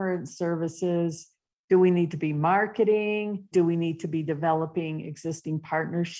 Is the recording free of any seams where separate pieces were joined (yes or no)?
yes